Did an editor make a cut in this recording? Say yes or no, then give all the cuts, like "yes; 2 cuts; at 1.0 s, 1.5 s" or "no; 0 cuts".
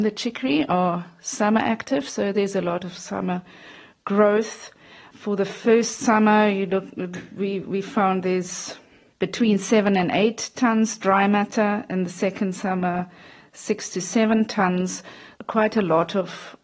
no; 0 cuts